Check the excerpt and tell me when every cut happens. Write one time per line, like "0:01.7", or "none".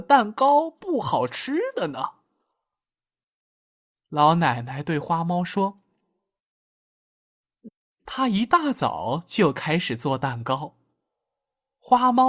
0:07.7